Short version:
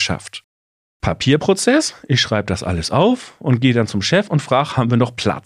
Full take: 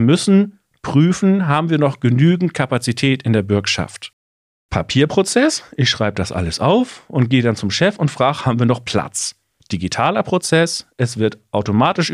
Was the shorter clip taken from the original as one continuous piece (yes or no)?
yes